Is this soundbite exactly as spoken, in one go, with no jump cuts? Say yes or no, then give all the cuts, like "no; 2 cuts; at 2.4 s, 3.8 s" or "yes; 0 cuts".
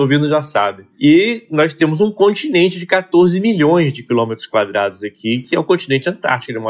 yes; 0 cuts